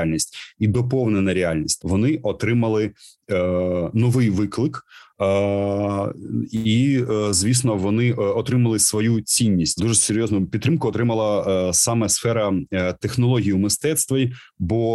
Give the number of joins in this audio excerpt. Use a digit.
2